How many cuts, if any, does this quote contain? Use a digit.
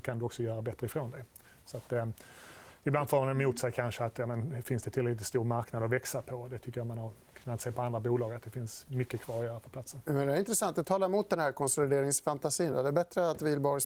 0